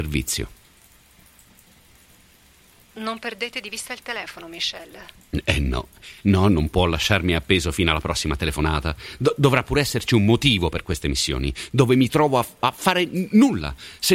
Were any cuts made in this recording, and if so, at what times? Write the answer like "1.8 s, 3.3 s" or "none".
none